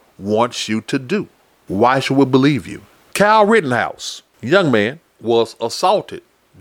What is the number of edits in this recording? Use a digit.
2